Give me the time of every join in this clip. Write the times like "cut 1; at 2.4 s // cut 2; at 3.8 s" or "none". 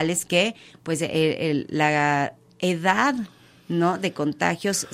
none